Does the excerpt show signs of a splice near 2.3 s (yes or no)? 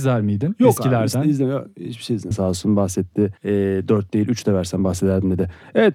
yes